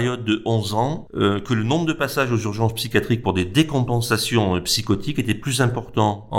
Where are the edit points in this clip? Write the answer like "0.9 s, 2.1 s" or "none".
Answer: none